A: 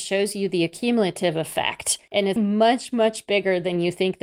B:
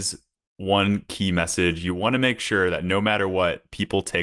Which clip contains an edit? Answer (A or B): A